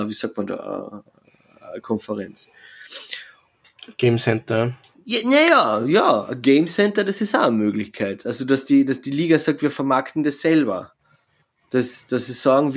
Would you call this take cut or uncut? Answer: uncut